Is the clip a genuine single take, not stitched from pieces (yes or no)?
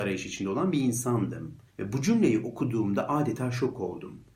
no